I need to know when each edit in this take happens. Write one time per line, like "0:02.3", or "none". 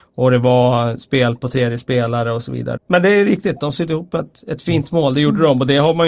0:02.8